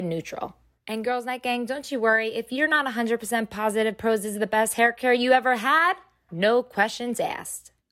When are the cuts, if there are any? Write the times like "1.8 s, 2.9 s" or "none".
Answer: 6.3 s